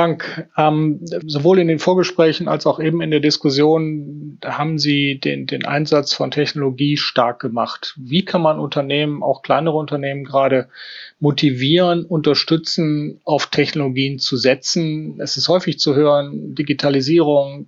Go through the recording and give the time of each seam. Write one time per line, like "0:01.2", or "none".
0:01.2